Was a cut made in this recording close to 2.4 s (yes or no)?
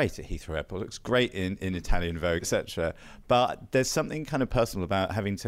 yes